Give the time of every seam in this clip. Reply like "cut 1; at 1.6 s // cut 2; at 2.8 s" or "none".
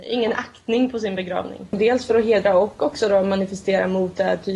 cut 1; at 1.7 s